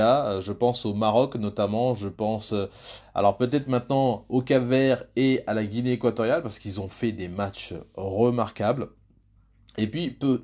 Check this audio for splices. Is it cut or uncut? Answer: uncut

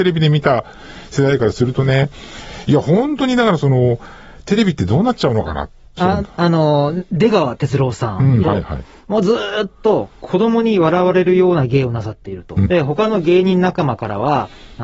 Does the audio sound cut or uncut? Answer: cut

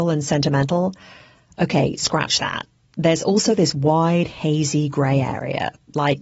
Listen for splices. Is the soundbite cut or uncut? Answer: uncut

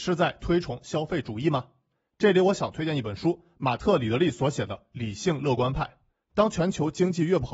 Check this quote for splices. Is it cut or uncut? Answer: uncut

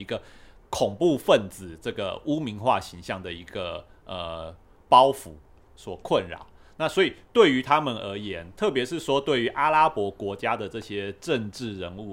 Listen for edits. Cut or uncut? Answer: uncut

